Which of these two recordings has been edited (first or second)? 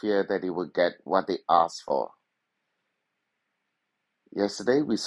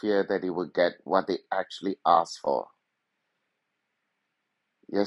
first